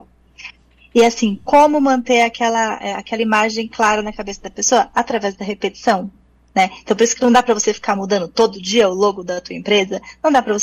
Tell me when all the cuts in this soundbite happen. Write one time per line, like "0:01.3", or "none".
none

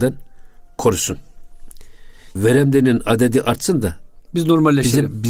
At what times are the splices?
0:02.4

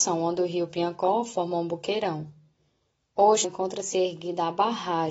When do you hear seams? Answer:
0:03.4

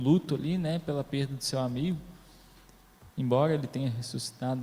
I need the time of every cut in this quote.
0:03.1

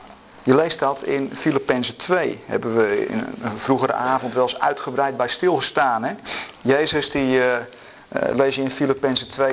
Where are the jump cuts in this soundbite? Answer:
0:03.1

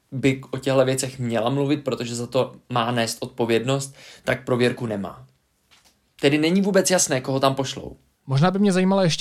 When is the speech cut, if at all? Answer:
none

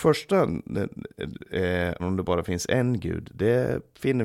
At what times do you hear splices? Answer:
0:02.0

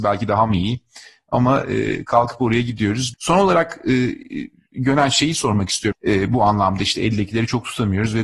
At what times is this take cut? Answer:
0:03.1
0:05.9

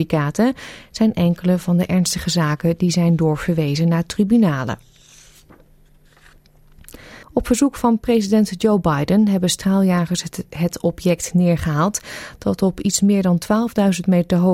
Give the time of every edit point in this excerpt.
0:07.2

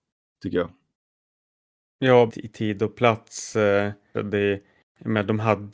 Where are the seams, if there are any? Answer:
0:02.3
0:04.1

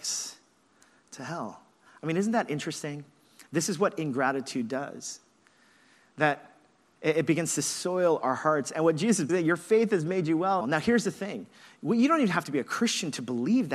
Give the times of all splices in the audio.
0:09.3
0:10.6

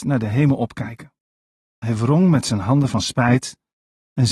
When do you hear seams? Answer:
none

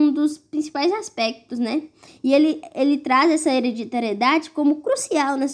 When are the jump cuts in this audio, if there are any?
0:02.1

